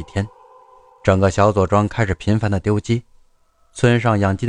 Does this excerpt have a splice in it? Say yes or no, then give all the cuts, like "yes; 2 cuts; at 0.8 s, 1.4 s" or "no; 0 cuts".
no; 0 cuts